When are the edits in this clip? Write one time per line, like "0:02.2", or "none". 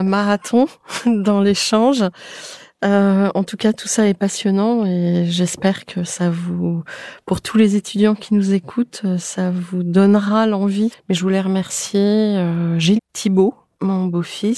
0:10.9
0:13.0